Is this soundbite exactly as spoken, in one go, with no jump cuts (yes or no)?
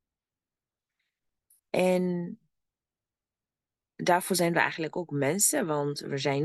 yes